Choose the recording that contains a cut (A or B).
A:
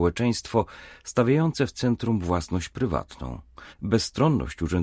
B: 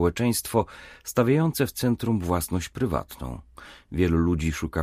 A